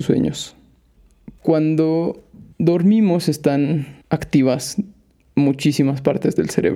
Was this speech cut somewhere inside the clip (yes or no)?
yes